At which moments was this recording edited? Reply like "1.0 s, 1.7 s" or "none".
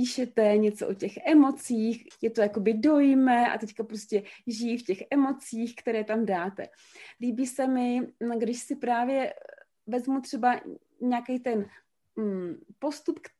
2.1 s, 7.2 s